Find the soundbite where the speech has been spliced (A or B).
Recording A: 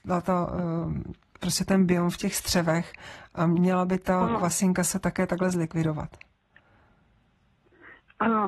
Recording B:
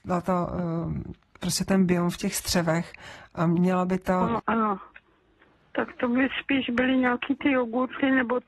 B